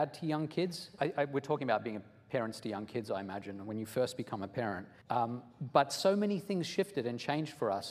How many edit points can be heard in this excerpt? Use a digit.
2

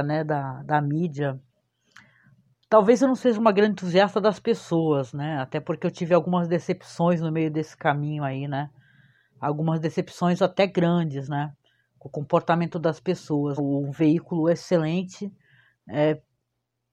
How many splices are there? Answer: 1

